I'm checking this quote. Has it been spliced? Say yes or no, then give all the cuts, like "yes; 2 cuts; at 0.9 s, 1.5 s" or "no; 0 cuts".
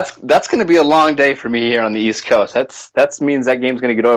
no; 0 cuts